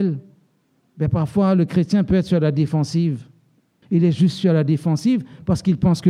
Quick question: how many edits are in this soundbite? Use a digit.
1